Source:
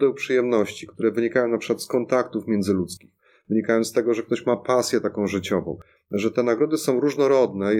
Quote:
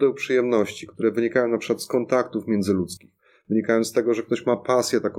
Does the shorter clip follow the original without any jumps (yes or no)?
yes